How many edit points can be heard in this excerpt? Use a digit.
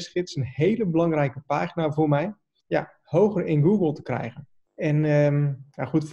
2